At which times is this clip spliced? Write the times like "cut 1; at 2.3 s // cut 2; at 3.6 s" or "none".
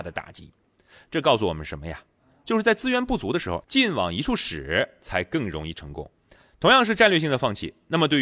cut 1; at 3.6 s